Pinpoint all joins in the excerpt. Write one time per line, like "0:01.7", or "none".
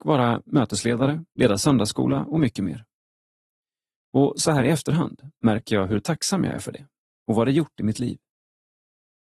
0:01.3